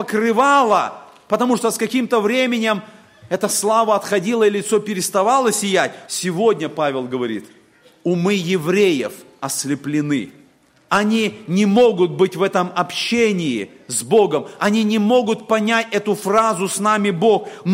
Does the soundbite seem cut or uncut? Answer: cut